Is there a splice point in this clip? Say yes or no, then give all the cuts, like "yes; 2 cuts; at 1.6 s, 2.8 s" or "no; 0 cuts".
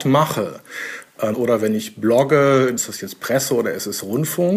yes; 2 cuts; at 1.3 s, 2.8 s